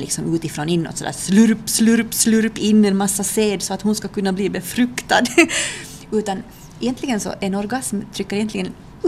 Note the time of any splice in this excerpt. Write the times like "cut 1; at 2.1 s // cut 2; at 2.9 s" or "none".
none